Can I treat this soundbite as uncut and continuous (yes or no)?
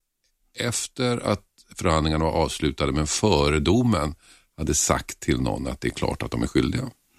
yes